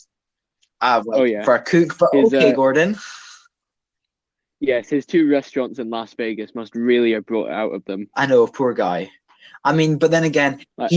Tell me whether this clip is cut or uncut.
uncut